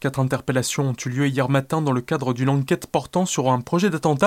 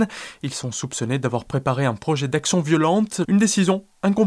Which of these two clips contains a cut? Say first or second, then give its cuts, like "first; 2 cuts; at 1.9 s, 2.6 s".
second; 1 cut; at 3.2 s